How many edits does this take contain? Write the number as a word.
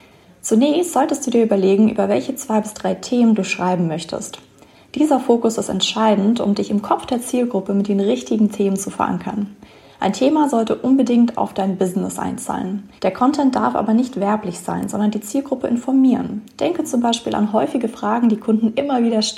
one